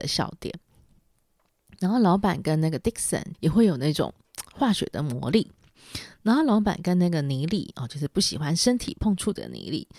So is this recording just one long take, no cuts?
no; 1 cut; at 3.3 s

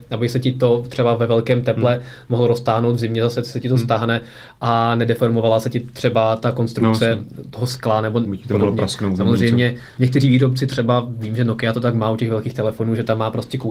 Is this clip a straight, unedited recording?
yes; 0 cuts

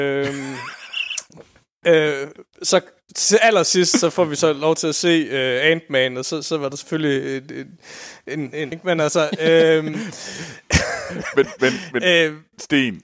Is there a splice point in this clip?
yes; 1 cut; at 8.7 s

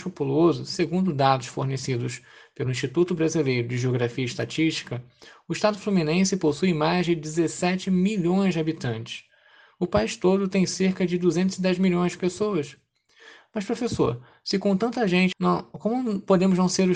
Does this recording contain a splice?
yes; 1 cut; at 15.3 s

